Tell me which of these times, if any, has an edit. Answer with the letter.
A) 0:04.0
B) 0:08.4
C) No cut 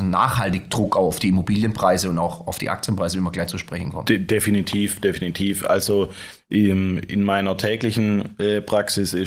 C